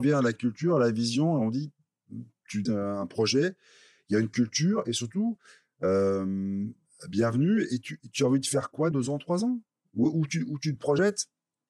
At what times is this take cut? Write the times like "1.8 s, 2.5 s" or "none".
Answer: 2.7 s, 8.9 s